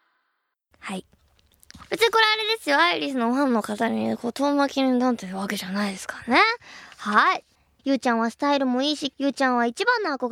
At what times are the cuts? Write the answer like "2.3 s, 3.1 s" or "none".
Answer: 1.9 s, 7.8 s, 9.1 s